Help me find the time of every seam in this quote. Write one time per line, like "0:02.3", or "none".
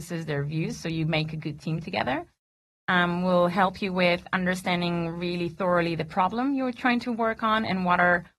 none